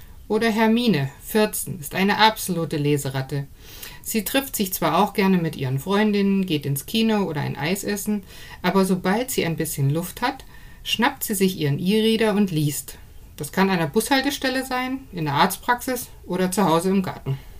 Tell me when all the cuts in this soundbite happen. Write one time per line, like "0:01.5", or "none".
none